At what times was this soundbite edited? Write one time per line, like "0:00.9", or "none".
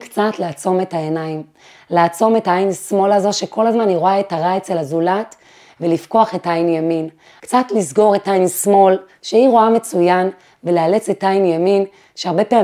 0:07.4